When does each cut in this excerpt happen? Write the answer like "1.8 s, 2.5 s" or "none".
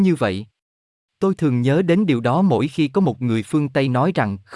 1.0 s